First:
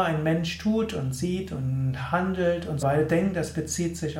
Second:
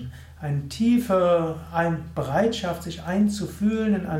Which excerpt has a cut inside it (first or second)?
first